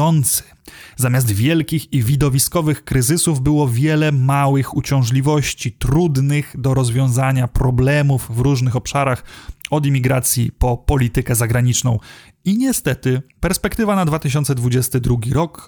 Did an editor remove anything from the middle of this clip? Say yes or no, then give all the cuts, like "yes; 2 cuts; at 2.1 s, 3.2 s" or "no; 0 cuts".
yes; 1 cut; at 13.3 s